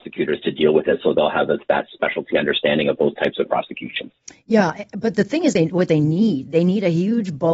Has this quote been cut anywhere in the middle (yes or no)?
no